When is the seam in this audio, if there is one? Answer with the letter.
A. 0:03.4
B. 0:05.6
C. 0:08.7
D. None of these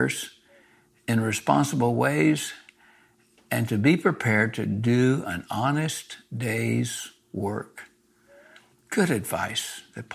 C